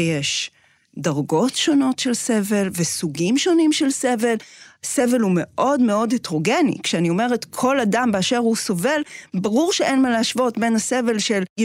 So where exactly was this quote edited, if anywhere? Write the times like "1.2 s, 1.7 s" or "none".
none